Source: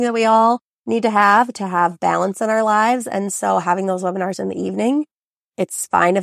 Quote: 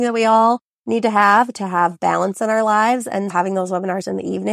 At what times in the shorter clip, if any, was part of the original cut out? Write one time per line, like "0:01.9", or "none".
0:03.3